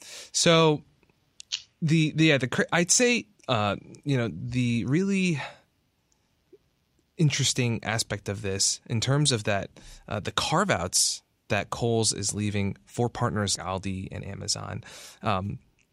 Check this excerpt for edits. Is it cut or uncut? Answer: cut